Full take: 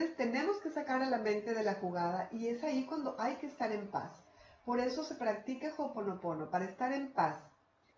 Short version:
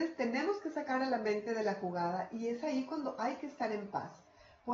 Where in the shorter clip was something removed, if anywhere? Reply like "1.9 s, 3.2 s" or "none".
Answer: none